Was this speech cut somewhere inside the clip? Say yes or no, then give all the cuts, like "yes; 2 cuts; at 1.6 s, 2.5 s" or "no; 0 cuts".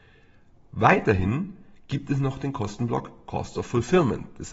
no; 0 cuts